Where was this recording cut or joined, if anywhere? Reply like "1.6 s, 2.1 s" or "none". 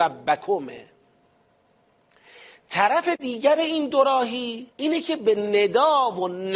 4.7 s

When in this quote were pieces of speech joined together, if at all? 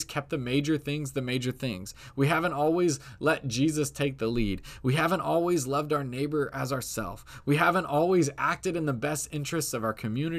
none

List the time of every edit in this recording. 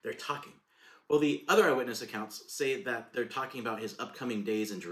none

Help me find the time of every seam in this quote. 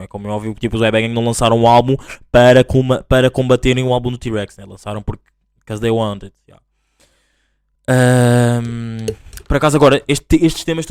none

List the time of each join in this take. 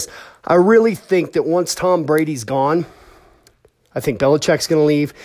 none

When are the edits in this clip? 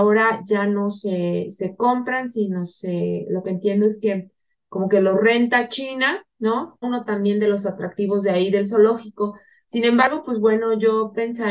6.8 s

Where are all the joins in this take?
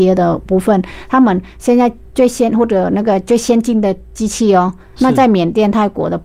5.0 s

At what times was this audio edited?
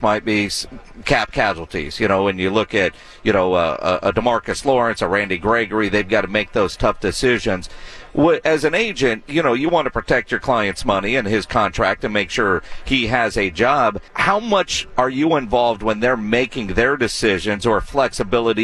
14.1 s

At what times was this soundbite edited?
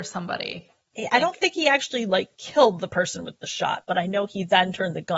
none

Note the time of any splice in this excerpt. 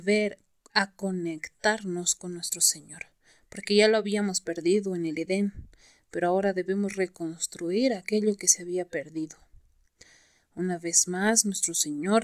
none

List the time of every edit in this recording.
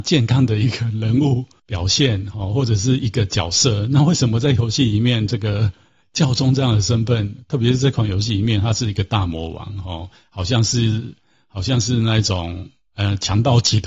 none

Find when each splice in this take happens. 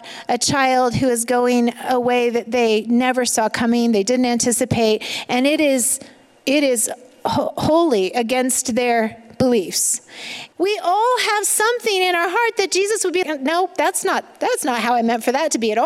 10.5 s, 13.2 s

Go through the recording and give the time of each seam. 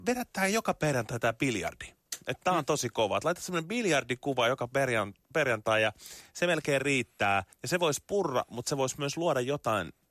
7.5 s

